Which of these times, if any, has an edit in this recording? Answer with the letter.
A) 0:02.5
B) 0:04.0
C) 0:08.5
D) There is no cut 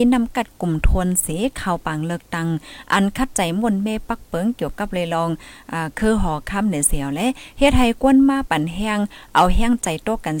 C